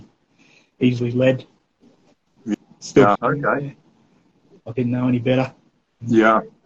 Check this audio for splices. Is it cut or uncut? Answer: cut